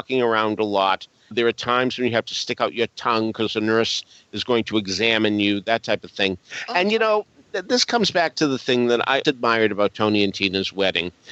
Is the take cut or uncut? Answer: cut